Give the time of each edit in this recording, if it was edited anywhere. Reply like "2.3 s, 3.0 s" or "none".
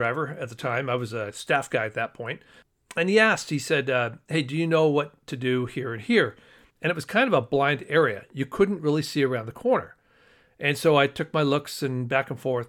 6.7 s